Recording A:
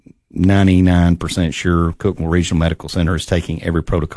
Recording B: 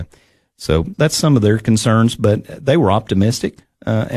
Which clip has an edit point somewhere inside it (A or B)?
B